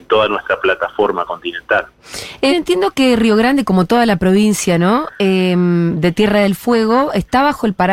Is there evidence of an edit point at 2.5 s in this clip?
yes; 1 cut; at 2.5 s

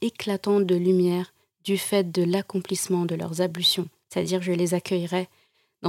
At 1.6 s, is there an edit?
no; 1 cut; at 4.0 s

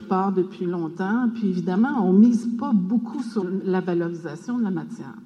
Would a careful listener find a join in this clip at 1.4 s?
no; 1 cut; at 3.4 s

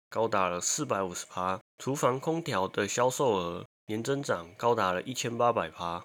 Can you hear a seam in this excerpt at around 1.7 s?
yes; 1 cut; at 1.7 s

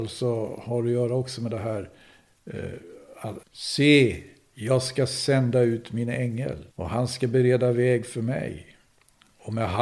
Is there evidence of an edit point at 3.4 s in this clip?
yes; 2 cuts; at 3.4 s, 6.7 s

